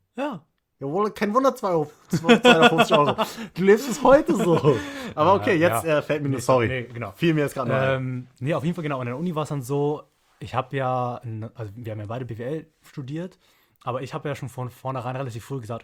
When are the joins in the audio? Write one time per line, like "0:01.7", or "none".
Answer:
none